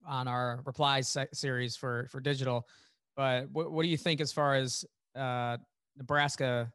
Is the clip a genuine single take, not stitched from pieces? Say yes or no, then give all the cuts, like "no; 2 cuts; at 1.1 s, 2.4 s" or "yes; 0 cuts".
yes; 0 cuts